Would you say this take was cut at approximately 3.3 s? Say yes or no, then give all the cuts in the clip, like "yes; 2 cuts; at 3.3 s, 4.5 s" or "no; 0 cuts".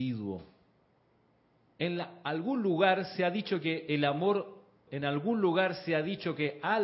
no; 2 cuts; at 1.7 s, 4.9 s